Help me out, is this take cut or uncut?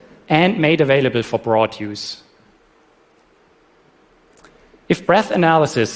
uncut